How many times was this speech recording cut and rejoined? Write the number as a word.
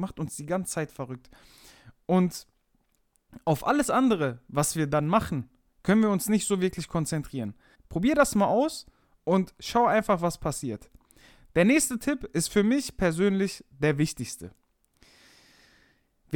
one